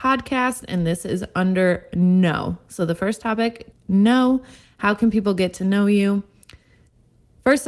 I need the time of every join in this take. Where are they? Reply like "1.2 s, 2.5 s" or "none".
3.7 s